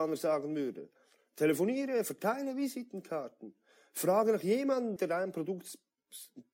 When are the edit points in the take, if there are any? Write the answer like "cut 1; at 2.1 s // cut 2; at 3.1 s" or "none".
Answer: cut 1; at 5.0 s